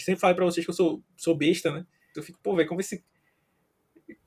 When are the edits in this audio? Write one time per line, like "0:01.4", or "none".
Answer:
0:02.1